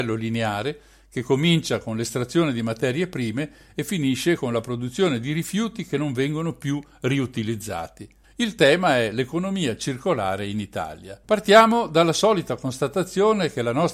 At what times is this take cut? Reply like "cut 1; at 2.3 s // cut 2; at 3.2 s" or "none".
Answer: cut 1; at 8.2 s // cut 2; at 11.2 s